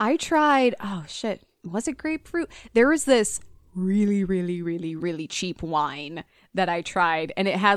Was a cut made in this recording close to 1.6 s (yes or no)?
no